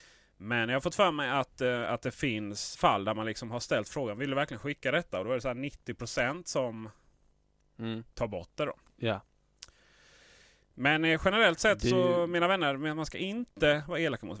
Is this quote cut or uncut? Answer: cut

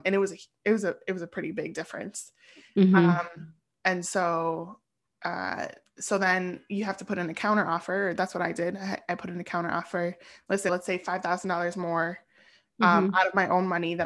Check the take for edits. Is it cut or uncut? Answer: cut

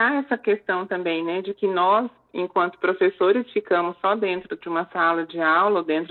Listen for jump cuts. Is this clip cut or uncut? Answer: uncut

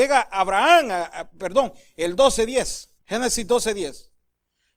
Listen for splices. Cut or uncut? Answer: cut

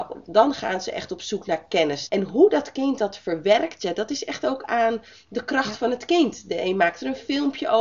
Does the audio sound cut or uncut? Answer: cut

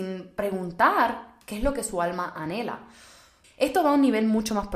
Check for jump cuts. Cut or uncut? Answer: cut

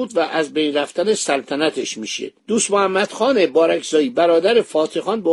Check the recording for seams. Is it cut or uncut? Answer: cut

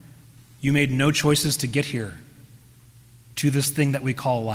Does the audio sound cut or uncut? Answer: uncut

